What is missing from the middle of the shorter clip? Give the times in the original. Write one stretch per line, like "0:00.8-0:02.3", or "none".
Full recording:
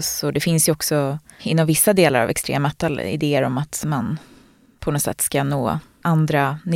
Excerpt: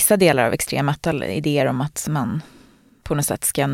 none